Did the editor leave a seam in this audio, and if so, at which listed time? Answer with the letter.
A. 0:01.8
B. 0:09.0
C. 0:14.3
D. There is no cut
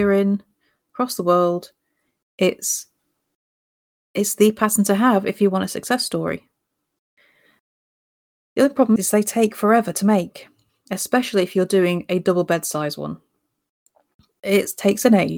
B